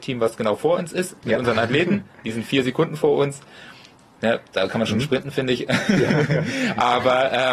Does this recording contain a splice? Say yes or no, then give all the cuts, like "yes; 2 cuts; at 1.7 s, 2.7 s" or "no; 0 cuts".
no; 0 cuts